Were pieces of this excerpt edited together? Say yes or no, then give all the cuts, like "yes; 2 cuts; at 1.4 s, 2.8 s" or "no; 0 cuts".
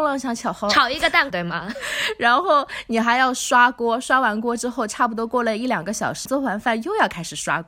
yes; 2 cuts; at 1.3 s, 6.3 s